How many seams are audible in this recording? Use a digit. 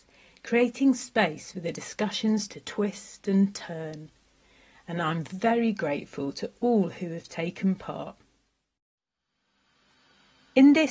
0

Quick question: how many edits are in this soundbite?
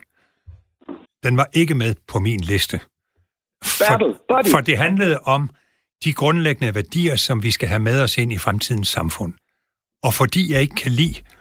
1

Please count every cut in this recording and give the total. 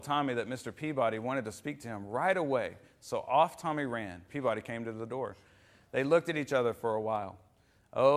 1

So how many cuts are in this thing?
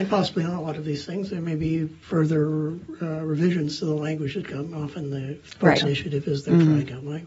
2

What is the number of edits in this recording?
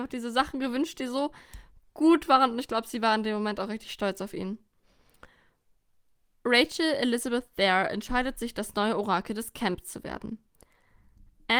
0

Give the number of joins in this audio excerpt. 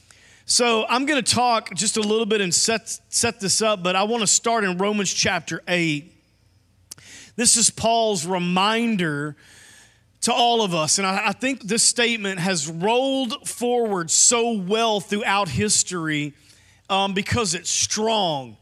1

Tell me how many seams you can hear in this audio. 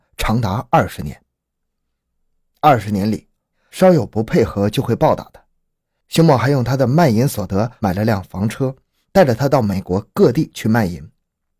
1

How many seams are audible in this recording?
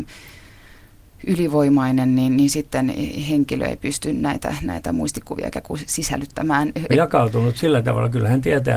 1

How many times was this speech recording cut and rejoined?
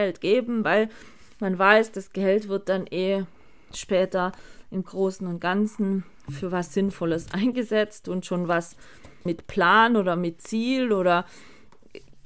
1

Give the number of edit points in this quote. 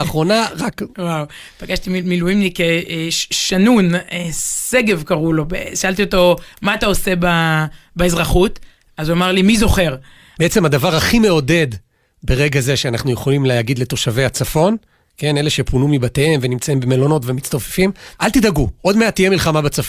2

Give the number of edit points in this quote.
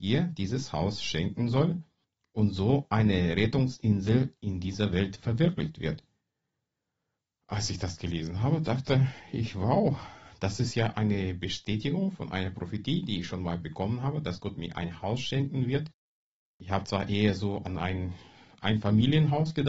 0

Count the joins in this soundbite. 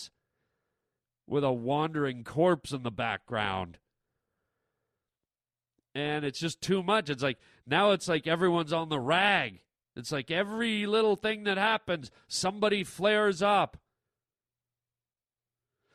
0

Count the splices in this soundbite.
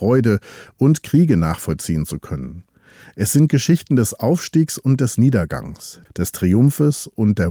1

